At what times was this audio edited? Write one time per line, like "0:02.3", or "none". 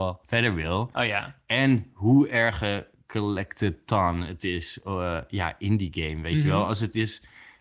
0:00.9